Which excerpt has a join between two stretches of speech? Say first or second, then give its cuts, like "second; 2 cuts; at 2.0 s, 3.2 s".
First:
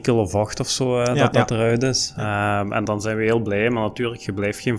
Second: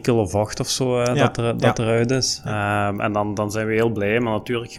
first; 2 cuts; at 1.3 s, 2.9 s